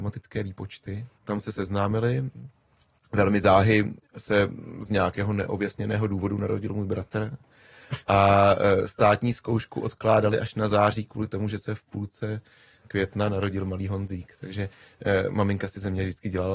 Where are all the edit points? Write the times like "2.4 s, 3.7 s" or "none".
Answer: 1.1 s